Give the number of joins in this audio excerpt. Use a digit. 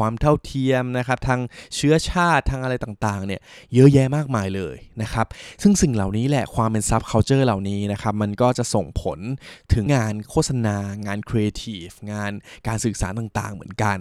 1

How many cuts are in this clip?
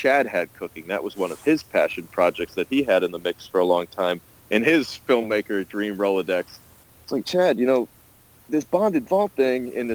1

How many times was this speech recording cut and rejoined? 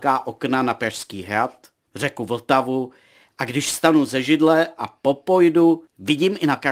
1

